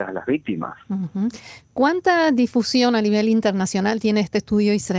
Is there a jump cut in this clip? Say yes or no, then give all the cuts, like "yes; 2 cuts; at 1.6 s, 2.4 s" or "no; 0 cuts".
no; 0 cuts